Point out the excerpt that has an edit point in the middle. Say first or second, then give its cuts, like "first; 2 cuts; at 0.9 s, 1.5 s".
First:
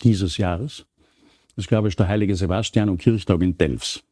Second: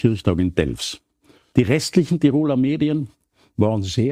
second; 1 cut; at 1.5 s